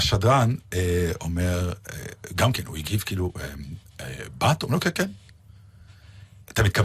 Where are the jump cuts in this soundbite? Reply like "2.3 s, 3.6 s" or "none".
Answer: none